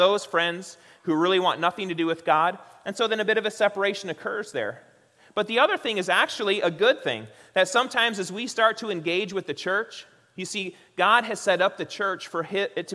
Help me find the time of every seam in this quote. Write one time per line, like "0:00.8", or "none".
none